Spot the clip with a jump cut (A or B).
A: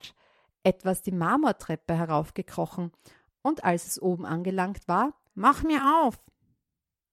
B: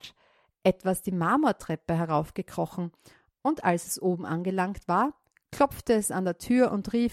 A